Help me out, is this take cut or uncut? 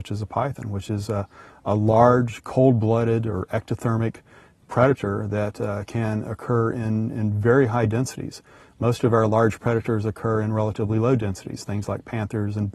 uncut